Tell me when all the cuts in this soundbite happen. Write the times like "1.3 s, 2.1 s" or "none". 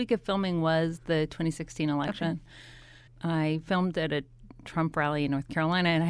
3.1 s